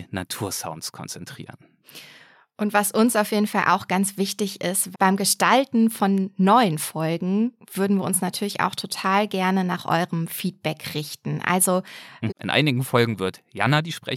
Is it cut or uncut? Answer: cut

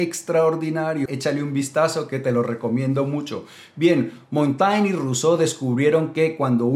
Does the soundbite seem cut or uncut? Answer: cut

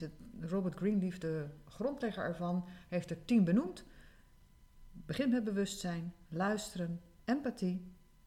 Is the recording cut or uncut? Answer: cut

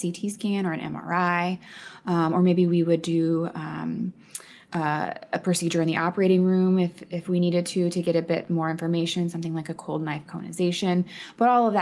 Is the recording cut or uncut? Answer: uncut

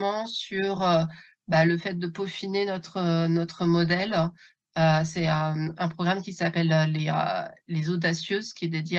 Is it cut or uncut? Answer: uncut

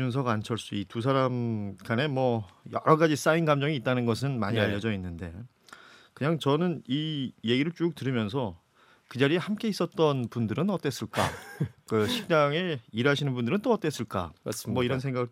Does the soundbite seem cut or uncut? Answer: uncut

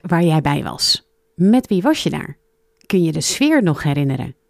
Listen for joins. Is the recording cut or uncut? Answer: uncut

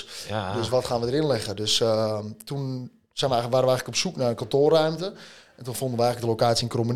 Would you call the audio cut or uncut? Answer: uncut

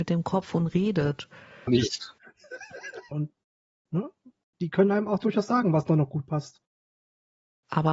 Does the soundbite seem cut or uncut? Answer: cut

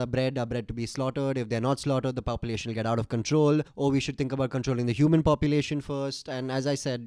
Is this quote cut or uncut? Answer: uncut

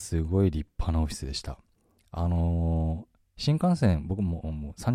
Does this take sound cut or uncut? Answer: uncut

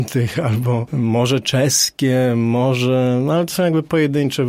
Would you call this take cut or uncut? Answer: uncut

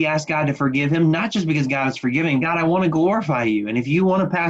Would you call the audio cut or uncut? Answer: cut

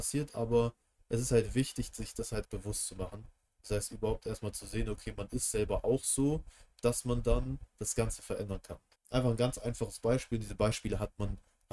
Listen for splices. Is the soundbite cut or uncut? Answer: cut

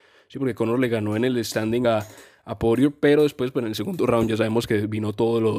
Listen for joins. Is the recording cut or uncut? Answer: uncut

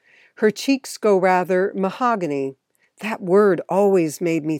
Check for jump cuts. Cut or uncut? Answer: cut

